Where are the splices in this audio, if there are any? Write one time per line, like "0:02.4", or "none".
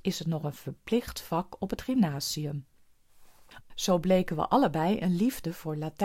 0:03.6